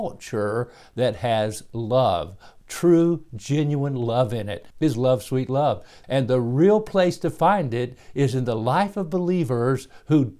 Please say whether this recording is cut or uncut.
cut